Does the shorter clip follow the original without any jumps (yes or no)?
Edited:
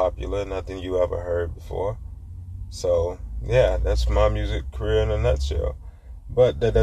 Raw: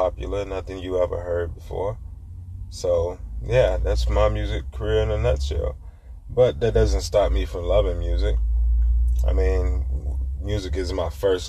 yes